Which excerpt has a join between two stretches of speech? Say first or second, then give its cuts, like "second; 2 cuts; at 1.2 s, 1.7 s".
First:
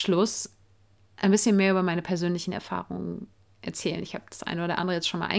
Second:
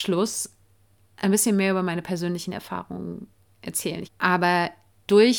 second; 1 cut; at 4.0 s